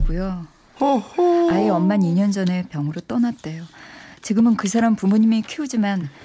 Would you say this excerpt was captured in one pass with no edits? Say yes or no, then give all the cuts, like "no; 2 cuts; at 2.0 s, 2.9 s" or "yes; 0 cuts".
yes; 0 cuts